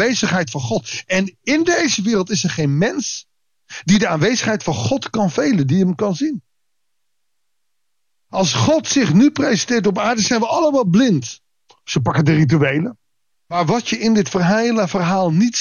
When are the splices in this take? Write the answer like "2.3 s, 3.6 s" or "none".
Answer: 11.7 s, 13.3 s